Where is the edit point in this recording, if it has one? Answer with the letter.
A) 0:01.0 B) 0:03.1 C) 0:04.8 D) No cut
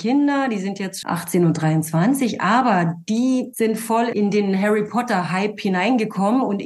A